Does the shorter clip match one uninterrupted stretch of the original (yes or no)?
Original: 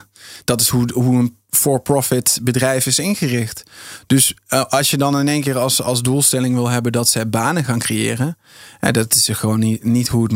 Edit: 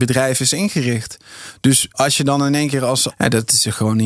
no